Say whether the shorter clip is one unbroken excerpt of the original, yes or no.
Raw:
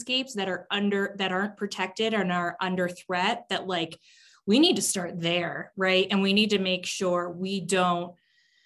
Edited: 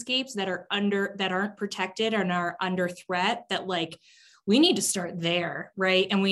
yes